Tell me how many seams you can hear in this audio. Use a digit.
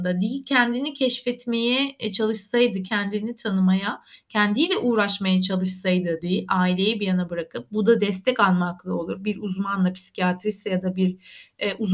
1